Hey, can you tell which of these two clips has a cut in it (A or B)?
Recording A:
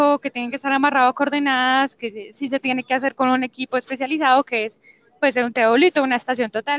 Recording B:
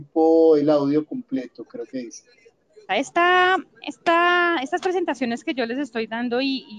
B